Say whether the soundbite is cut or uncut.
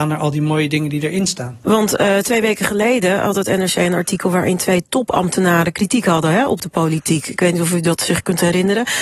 cut